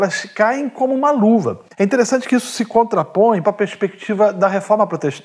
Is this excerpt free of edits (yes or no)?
no